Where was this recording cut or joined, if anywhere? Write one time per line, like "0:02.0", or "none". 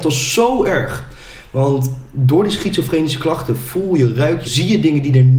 0:04.4